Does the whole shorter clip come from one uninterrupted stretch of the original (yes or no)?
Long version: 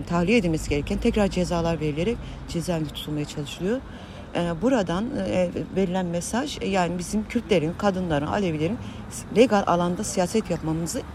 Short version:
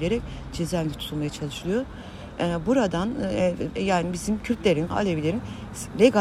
no